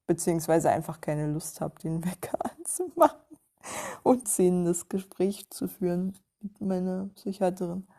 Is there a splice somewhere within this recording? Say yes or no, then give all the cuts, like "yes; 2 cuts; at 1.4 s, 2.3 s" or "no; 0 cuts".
yes; 1 cut; at 4.2 s